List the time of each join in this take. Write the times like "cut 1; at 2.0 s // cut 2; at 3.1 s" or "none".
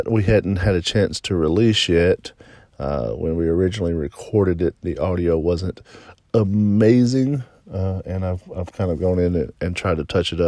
none